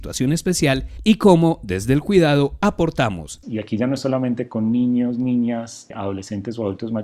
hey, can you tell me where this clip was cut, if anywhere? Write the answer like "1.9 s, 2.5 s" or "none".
3.4 s